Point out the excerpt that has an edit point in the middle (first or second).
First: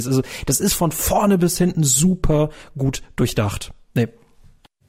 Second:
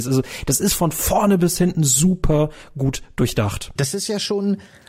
second